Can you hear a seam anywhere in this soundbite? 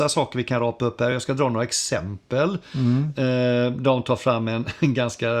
no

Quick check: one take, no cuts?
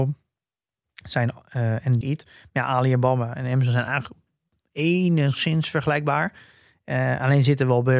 no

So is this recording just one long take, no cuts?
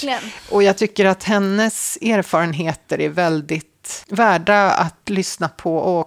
no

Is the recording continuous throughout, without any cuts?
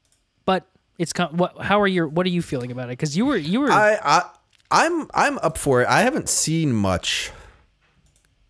yes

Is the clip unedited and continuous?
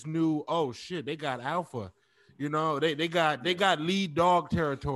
yes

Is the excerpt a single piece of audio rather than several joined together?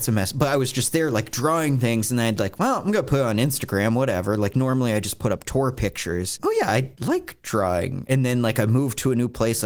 no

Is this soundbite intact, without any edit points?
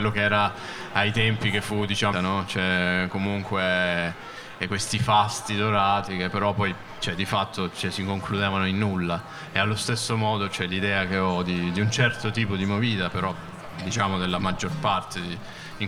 no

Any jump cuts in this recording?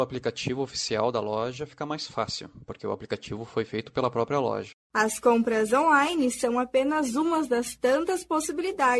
yes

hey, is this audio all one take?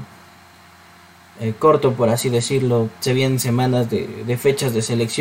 yes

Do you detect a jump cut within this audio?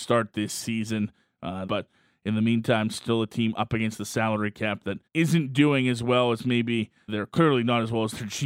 yes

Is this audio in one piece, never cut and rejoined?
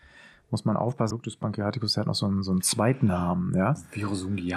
no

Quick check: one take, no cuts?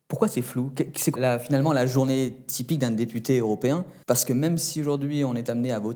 no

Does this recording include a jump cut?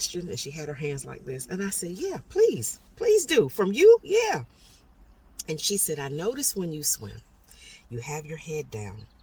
no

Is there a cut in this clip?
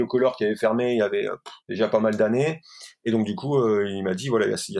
yes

